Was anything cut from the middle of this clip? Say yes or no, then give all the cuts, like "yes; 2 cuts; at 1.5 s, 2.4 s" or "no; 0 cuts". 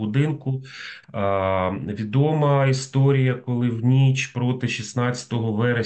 yes; 1 cut; at 1.0 s